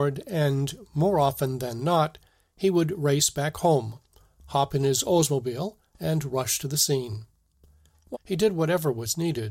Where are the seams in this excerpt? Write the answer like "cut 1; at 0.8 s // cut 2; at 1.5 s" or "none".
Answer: cut 1; at 8.1 s